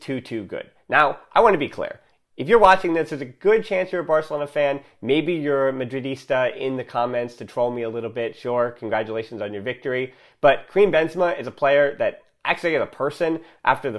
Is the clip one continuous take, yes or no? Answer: yes